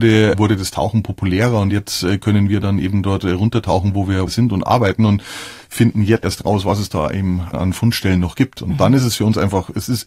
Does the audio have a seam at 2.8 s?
no; 1 cut; at 6.2 s

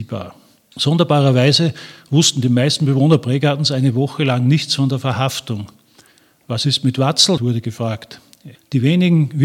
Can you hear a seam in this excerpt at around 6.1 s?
no; 2 cuts; at 7.4 s, 8.6 s

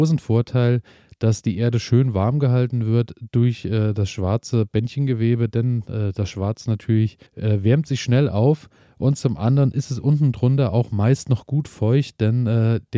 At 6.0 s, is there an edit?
no; 1 cut; at 7.3 s

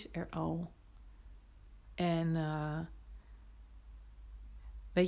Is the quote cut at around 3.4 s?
no; 1 cut; at 1.9 s

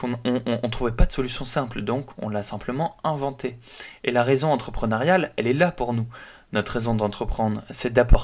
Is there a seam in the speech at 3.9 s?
no; 0 cuts

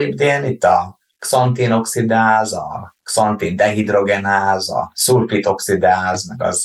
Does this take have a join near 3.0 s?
yes; 1 cut; at 3.0 s

